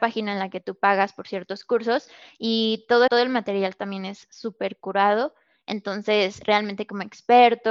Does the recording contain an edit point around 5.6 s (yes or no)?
no